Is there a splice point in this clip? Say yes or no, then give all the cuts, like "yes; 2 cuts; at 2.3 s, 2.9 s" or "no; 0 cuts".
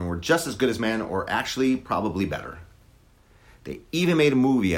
no; 0 cuts